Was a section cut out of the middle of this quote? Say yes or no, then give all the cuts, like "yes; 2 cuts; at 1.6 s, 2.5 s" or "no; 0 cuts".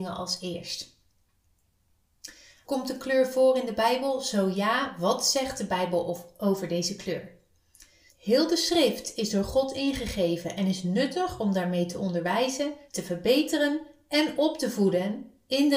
yes; 3 cuts; at 2.6 s, 8.1 s, 12.9 s